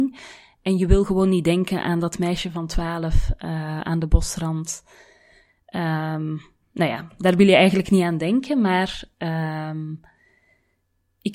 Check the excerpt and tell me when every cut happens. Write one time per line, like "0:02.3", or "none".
none